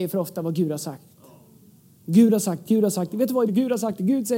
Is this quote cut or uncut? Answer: cut